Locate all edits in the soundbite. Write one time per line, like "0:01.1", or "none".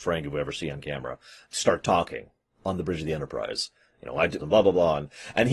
0:01.4
0:04.4

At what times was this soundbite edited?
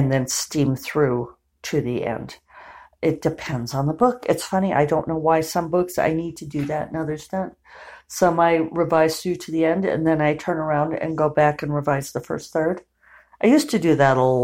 none

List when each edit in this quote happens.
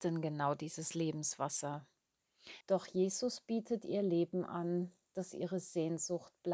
0:02.6

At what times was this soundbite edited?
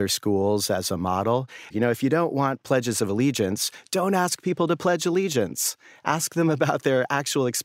0:01.7

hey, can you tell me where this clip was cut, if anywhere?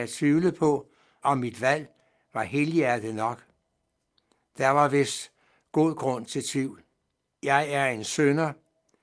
0:01.2
0:07.3

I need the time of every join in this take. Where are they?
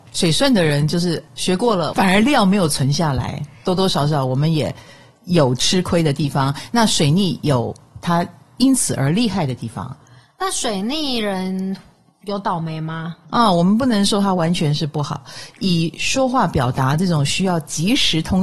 0:01.9
0:13.2

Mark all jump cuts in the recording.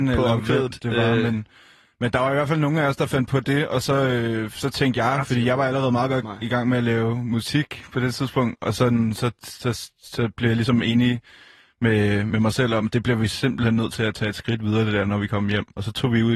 none

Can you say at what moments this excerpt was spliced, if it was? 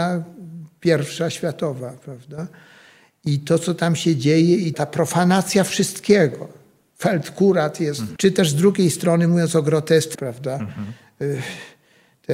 0:04.7
0:08.2
0:10.1

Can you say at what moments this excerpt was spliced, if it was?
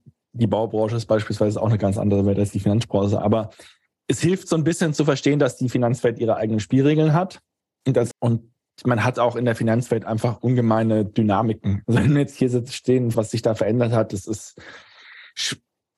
0:08.1
0:11.8
0:13.1

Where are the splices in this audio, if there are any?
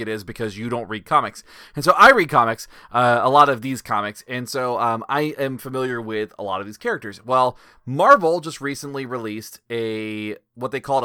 none

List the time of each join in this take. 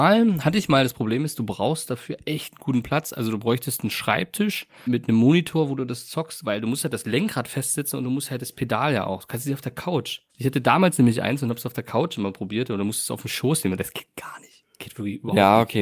0:04.9
0:10.3

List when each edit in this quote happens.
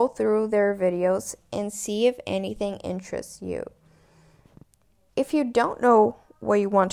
0:05.1

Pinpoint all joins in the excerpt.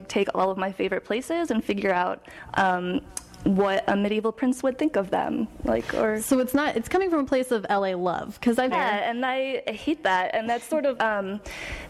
0:08.7
0:11.0

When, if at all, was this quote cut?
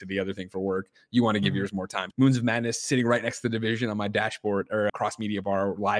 0:02.1
0:04.9

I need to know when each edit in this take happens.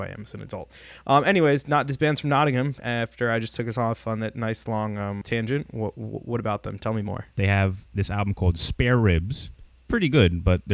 0:05.2

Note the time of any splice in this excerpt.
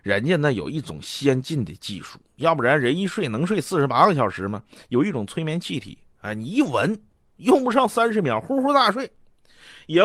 none

